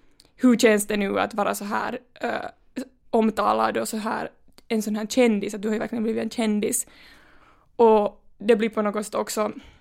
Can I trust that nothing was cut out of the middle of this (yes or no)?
yes